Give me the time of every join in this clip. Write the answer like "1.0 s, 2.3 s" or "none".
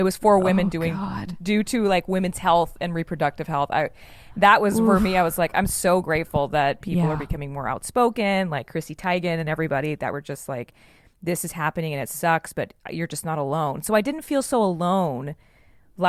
none